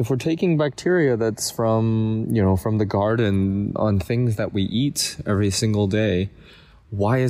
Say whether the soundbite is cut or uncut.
cut